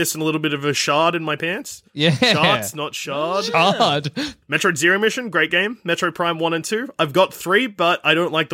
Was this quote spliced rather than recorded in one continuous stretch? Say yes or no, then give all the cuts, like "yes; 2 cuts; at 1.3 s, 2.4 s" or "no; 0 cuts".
yes; 1 cut; at 4.4 s